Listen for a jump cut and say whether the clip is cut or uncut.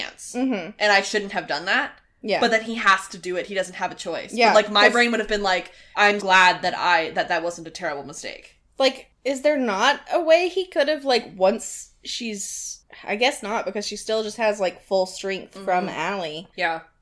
cut